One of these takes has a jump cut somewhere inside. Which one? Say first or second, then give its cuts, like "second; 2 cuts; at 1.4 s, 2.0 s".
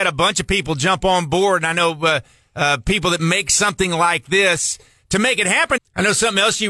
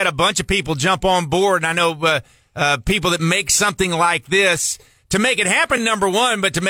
first; 1 cut; at 5.8 s